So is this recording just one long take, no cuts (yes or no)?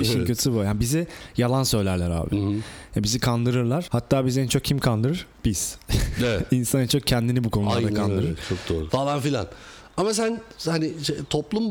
no